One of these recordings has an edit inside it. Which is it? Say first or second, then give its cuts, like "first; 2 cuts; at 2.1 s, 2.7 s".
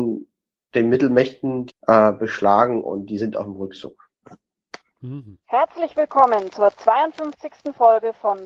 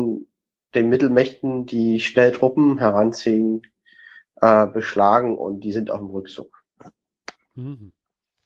first; 2 cuts; at 1.7 s, 5.4 s